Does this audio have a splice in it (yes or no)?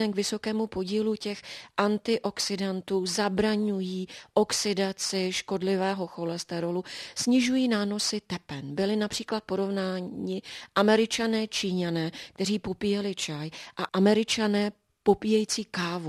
no